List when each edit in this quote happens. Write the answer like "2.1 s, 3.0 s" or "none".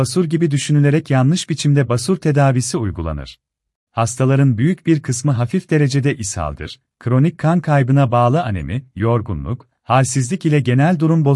3.9 s